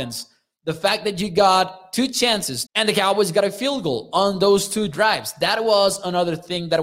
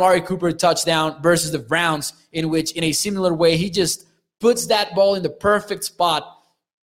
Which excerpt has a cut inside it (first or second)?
first